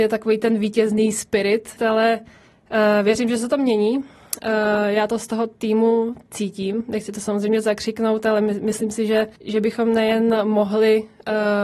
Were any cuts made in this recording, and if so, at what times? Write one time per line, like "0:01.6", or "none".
0:01.8
0:09.4